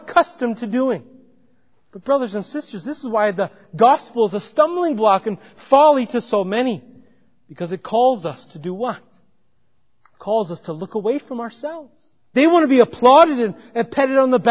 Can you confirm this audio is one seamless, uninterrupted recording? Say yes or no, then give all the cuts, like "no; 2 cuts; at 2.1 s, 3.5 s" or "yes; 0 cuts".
no; 2 cuts; at 1.7 s, 12.3 s